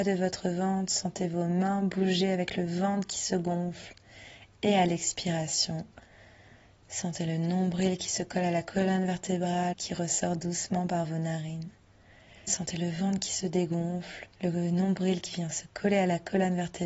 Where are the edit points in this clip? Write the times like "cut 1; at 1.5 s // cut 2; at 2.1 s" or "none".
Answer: cut 1; at 9.7 s // cut 2; at 12.5 s // cut 3; at 14.3 s